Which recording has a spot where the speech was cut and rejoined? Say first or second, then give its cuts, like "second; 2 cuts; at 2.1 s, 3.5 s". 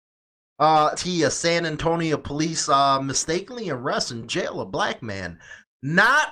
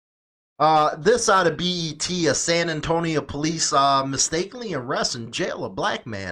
first; 1 cut; at 1.0 s